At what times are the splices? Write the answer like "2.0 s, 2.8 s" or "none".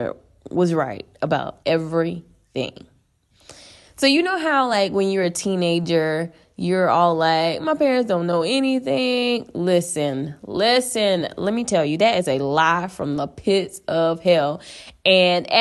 1.6 s